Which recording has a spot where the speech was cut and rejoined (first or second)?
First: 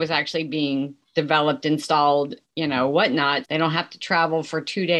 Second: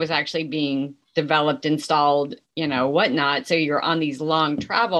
first